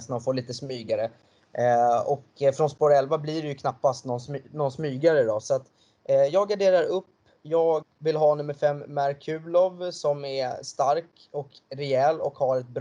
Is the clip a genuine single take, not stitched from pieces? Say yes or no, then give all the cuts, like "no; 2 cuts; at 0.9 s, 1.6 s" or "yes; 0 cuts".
no; 1 cut; at 7.8 s